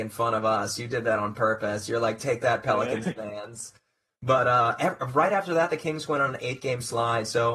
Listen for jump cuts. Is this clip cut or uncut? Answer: uncut